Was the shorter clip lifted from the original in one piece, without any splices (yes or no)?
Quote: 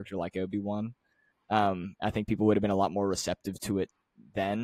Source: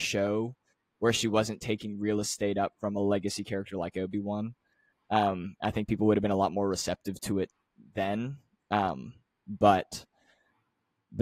yes